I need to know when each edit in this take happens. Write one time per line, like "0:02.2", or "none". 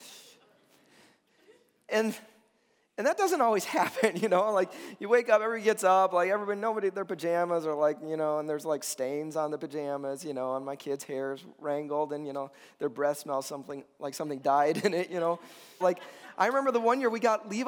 0:15.8